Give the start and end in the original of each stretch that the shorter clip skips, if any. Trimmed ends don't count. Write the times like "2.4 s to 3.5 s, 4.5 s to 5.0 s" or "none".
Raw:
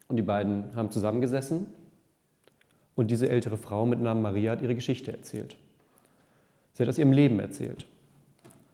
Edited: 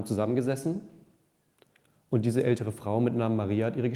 none

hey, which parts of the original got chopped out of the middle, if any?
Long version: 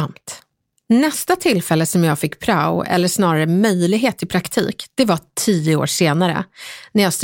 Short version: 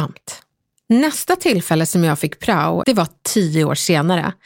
2.8 s to 4.9 s

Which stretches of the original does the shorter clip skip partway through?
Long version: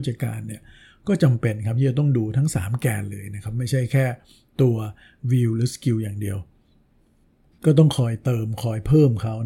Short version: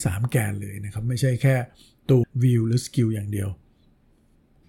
4.7 s to 5.1 s

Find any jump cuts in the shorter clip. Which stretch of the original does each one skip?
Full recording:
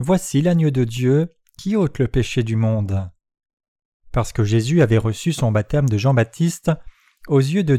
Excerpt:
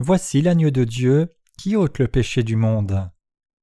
none

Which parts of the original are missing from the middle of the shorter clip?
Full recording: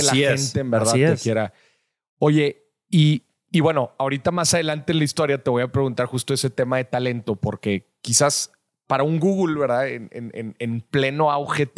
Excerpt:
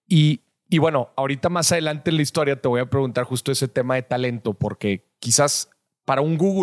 none

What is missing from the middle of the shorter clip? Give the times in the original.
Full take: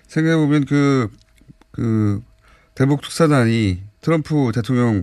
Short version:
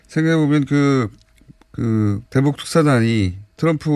2.3 s to 2.7 s

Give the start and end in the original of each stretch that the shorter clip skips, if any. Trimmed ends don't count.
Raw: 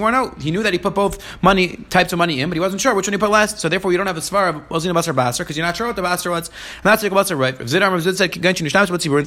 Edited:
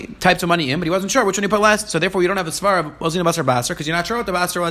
none

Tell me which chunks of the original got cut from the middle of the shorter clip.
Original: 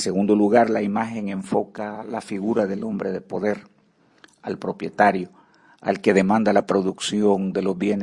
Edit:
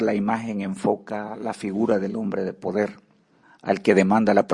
4.1 s to 5.6 s

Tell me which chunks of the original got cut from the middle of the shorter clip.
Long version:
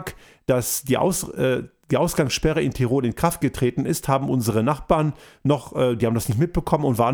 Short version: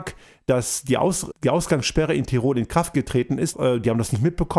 1.3 s to 1.8 s, 4.0 s to 5.7 s

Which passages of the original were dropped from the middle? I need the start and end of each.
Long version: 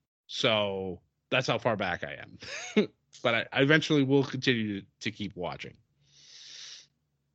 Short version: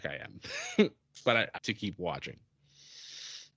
3.5 s to 4.9 s

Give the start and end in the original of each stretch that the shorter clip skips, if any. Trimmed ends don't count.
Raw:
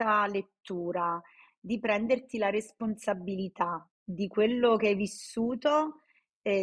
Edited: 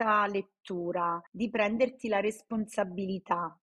1.3 s to 1.6 s

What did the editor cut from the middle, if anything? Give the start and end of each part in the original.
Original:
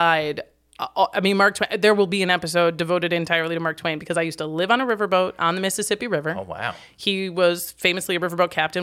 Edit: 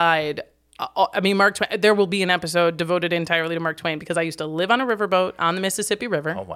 none

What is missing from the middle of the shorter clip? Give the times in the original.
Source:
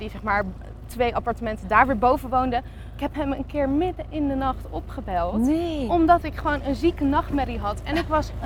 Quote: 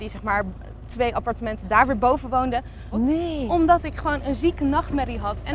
2.9 s to 5.3 s

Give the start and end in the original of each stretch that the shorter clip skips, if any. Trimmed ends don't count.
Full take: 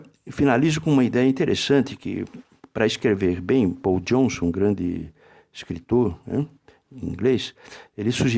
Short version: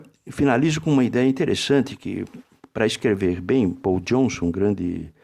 none

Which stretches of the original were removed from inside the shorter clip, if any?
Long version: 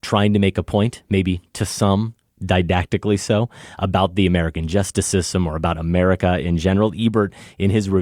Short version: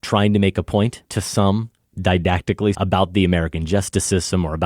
1.0 s to 1.5 s, 3.2 s to 3.8 s

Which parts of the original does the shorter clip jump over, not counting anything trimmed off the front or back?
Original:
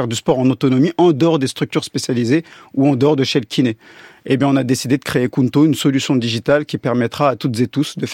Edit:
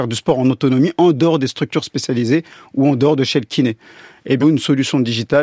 4.4 s to 5.6 s

